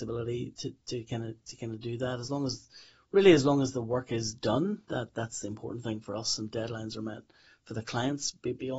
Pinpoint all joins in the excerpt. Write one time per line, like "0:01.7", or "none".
none